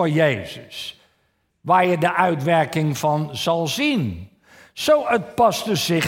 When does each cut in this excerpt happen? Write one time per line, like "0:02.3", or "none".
none